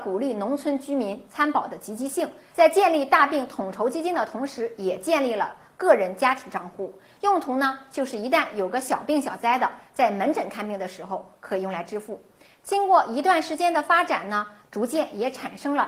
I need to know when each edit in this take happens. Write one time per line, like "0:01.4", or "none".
none